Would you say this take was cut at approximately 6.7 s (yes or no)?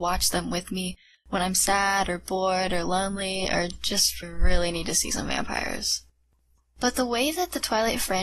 no